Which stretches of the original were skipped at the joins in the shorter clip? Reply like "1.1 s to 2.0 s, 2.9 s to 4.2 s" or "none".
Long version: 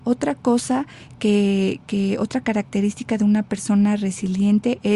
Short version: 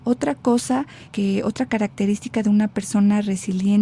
1.1 s to 1.8 s